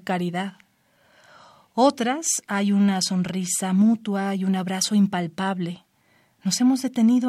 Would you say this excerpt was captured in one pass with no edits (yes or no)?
yes